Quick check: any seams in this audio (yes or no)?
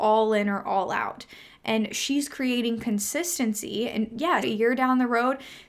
yes